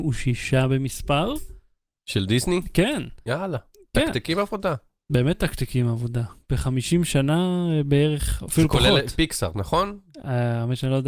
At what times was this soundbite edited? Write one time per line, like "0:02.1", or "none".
none